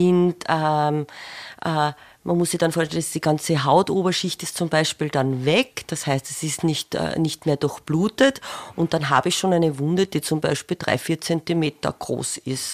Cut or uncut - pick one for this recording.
uncut